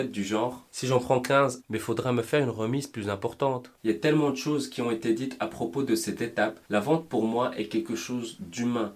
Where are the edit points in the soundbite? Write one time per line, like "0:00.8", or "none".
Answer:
0:01.6
0:03.8
0:06.6